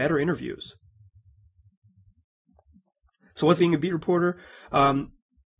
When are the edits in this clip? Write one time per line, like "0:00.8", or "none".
0:03.6

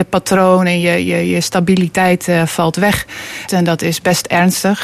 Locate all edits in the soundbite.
0:03.5

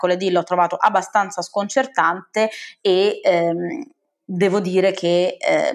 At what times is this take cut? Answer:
none

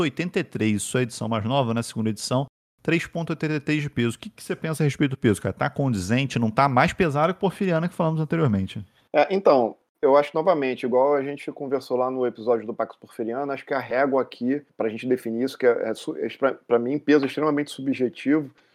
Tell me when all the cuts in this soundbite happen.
none

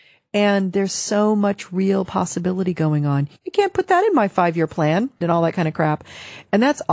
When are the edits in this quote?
0:03.4
0:05.2

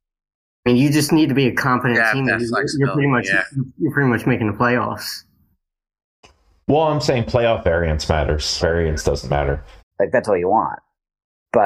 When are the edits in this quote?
0:08.6
0:09.8

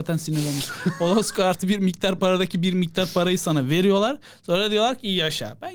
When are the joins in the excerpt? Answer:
none

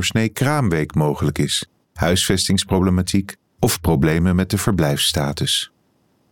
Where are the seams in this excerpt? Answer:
0:01.8

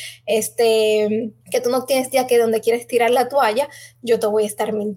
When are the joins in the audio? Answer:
0:01.4

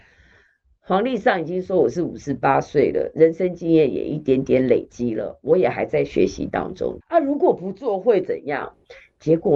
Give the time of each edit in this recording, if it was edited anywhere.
0:07.0

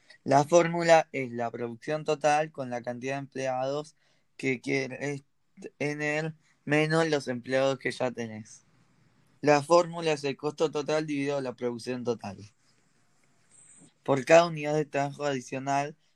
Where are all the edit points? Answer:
0:09.4
0:13.9

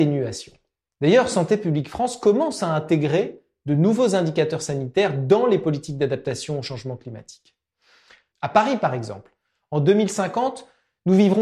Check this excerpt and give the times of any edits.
0:00.9
0:08.3

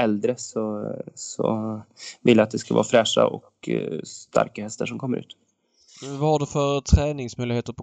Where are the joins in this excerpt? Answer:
none

